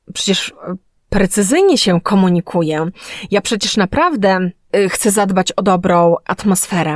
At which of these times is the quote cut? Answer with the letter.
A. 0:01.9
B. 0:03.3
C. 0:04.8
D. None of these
D